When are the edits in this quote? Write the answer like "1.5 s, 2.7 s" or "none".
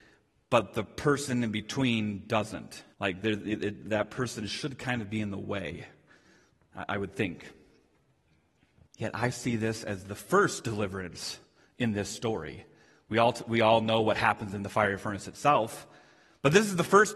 2.9 s, 8.9 s